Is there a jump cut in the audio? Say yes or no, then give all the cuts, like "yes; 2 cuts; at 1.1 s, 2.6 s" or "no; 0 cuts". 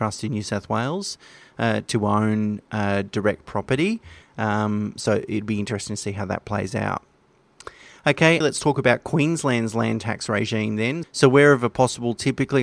yes; 3 cuts; at 4.2 s, 8.4 s, 11.0 s